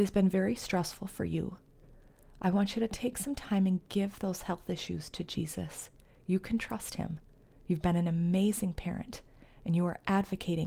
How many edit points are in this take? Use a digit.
0